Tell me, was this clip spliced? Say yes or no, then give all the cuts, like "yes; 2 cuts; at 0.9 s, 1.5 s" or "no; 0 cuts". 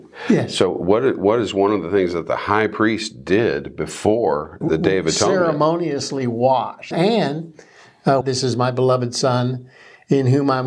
yes; 3 cuts; at 4.6 s, 6.9 s, 8.2 s